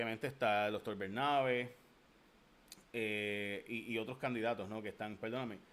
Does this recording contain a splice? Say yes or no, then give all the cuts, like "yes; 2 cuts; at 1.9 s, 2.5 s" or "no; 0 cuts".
no; 0 cuts